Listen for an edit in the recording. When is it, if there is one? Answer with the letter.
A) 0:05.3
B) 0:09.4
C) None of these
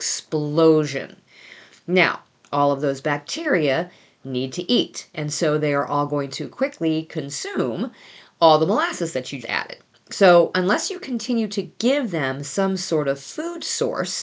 B